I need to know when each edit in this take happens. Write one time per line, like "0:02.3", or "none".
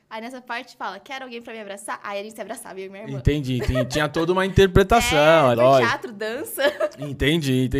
0:05.5